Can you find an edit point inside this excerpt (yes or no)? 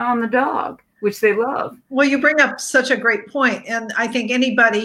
no